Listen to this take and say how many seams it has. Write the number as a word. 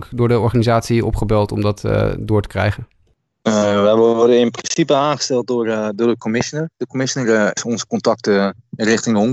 zero